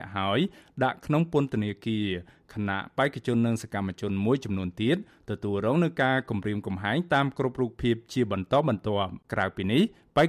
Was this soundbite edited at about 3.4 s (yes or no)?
no